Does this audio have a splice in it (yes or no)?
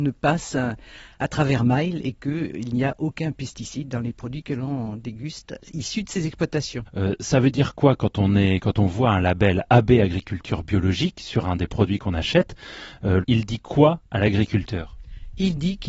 yes